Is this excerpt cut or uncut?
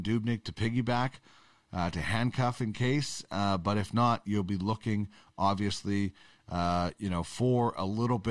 uncut